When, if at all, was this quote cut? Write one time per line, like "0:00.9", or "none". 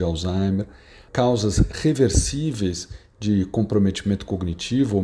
0:01.1